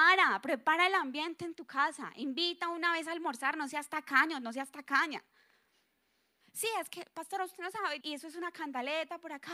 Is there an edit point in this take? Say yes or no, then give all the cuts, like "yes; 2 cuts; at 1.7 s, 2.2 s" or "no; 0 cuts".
yes; 2 cuts; at 6.4 s, 8.0 s